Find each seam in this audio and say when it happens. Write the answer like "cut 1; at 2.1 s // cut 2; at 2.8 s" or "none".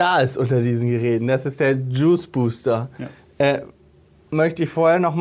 none